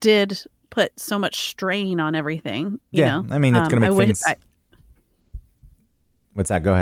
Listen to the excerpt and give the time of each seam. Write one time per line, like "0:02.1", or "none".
0:02.8